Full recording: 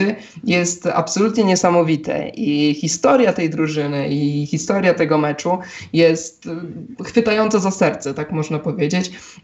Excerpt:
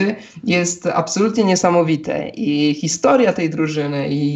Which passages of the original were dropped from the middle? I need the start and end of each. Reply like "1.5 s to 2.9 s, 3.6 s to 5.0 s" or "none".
none